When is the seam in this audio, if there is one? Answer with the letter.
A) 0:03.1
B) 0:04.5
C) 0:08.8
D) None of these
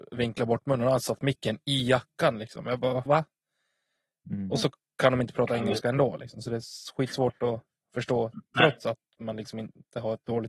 A